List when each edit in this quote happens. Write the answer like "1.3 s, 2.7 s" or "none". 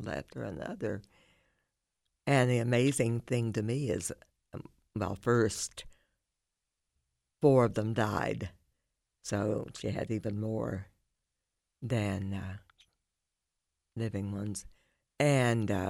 none

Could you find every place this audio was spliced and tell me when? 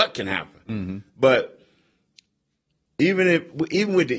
none

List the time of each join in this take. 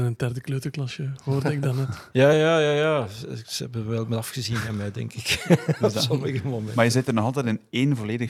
2.3 s

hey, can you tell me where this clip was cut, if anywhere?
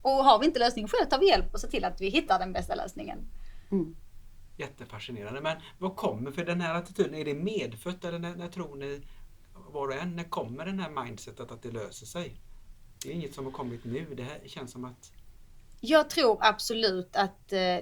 none

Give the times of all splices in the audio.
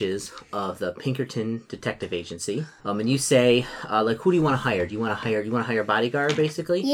2.8 s

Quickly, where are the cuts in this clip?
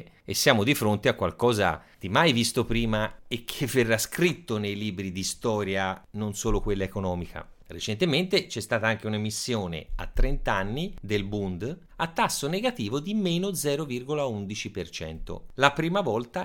11.9 s

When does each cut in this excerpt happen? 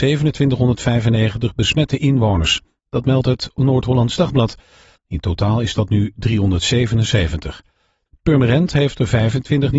5.0 s, 8.1 s

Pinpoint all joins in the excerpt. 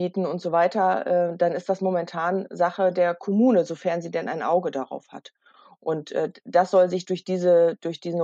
none

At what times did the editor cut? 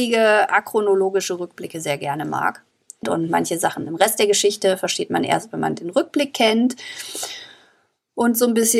3.0 s

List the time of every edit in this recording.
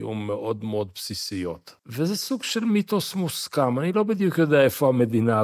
1.8 s

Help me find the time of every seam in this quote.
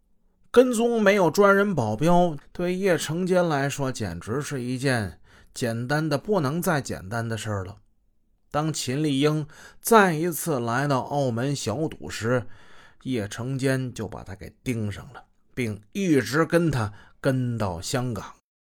2.4 s

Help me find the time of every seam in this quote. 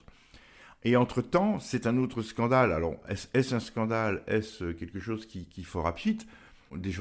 none

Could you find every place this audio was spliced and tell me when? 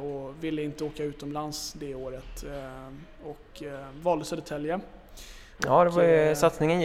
5.6 s

